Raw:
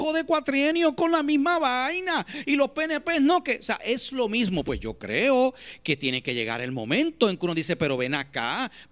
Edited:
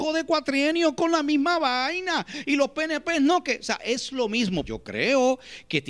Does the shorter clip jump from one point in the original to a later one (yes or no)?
yes